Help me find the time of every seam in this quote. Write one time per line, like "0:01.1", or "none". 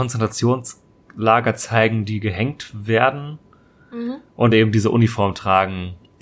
none